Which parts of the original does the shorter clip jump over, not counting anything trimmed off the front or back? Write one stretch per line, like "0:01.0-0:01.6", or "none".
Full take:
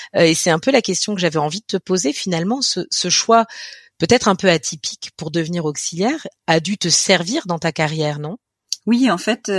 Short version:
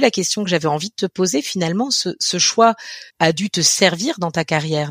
0:03.8-0:06.4